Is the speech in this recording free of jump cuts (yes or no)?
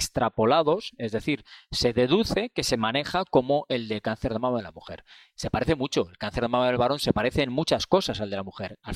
yes